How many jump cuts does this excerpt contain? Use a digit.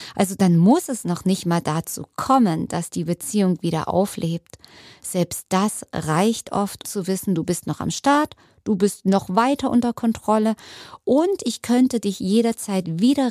1